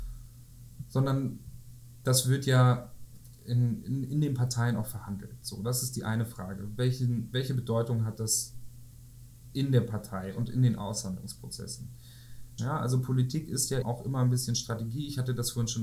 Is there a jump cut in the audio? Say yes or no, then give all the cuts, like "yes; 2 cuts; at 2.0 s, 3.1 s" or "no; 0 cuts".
yes; 2 cuts; at 12.6 s, 13.8 s